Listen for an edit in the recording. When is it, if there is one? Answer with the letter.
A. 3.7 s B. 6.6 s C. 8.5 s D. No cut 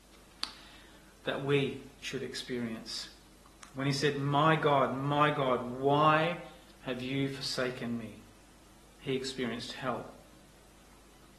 D